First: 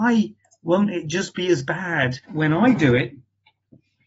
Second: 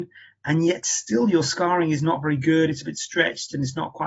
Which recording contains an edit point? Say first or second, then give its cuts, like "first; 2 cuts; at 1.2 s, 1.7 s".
first; 1 cut; at 2.2 s